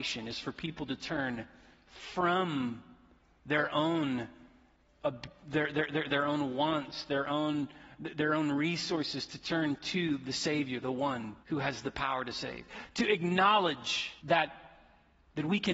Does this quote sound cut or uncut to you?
cut